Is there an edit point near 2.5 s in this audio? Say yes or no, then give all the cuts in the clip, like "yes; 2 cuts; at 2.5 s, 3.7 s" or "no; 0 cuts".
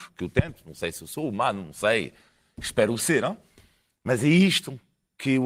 no; 0 cuts